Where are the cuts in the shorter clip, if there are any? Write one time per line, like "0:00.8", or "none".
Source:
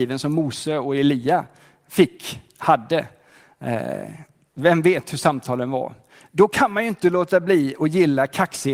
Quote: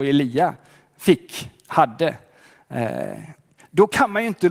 0:03.6